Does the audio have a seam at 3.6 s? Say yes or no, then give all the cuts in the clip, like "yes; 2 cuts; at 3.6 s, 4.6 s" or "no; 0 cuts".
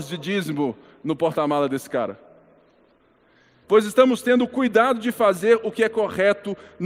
yes; 1 cut; at 3.6 s